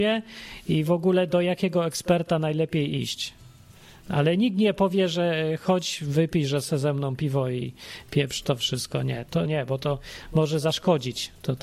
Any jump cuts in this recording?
yes; 1 cut; at 9.5 s

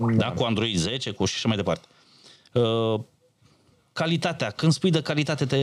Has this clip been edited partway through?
no; 0 cuts

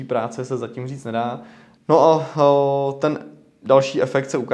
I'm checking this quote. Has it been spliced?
yes; 1 cut; at 1.8 s

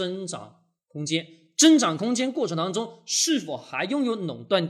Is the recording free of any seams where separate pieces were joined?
yes; 0 cuts

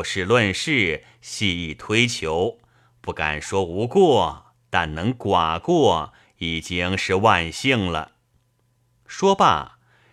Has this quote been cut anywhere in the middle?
no; 0 cuts

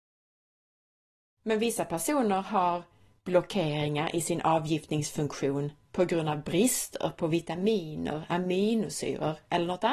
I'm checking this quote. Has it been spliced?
yes; 1 cut; at 1.3 s

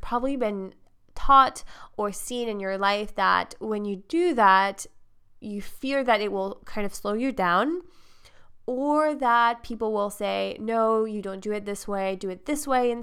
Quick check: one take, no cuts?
yes; 0 cuts

